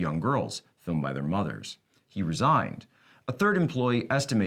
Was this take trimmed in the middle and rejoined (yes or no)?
no